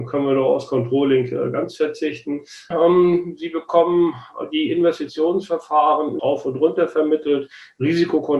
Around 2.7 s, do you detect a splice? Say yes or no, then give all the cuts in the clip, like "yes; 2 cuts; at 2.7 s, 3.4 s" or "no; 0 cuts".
yes; 2 cuts; at 2.7 s, 6.2 s